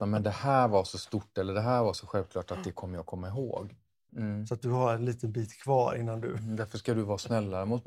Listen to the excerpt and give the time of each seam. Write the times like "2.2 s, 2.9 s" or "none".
4.1 s